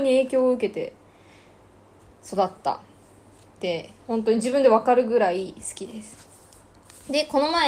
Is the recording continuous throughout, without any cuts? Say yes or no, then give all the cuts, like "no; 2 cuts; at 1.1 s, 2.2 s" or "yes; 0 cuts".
no; 1 cut; at 4.0 s